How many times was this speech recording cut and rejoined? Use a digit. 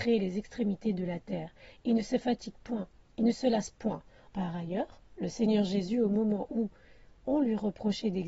1